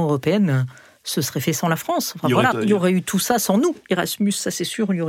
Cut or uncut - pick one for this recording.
cut